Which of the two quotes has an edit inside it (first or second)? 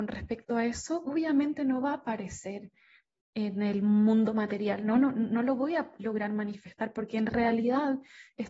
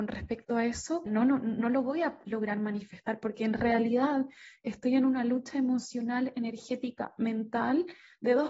second